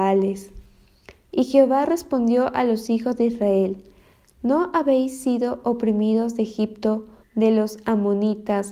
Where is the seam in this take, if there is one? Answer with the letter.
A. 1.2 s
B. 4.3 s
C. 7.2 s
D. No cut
C